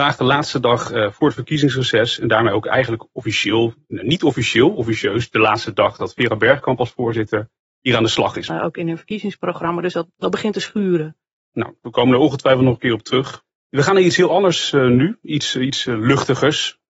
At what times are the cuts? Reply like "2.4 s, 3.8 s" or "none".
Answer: 8.5 s